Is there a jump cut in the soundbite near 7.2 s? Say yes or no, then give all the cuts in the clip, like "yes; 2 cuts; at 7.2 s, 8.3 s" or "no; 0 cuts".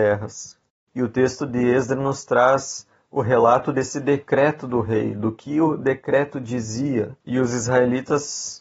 yes; 1 cut; at 7.2 s